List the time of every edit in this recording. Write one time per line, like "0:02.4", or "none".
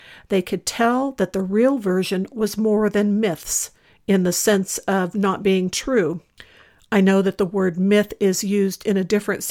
none